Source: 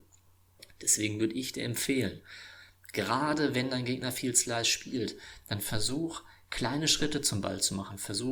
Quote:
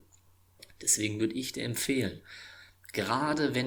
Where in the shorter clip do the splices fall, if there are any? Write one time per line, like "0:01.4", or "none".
none